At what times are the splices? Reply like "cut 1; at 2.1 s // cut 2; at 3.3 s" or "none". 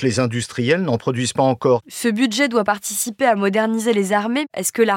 cut 1; at 1.8 s